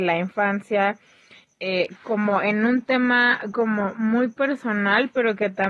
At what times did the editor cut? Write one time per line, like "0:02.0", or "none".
none